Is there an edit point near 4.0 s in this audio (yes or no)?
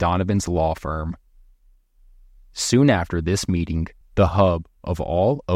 yes